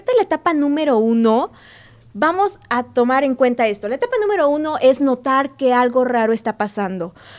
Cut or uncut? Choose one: uncut